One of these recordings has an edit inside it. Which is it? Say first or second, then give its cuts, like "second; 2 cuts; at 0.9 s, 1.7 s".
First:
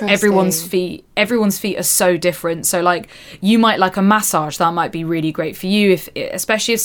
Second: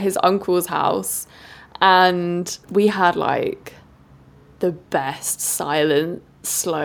second; 1 cut; at 2.6 s